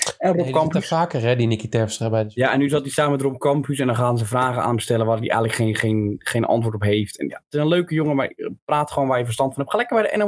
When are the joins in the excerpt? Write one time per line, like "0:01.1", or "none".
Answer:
none